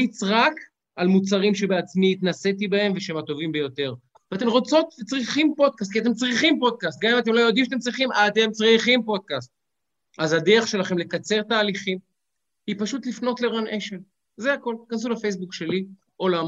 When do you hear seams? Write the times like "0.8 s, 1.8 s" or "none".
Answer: 4.1 s